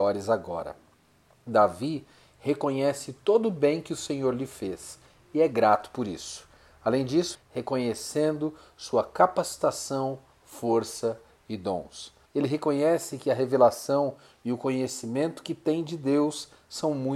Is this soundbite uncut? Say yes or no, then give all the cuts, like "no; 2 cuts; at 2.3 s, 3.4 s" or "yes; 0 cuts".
no; 2 cuts; at 7.3 s, 12.3 s